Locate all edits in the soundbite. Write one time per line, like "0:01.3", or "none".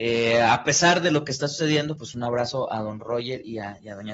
none